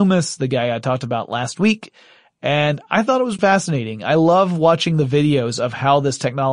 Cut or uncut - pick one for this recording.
cut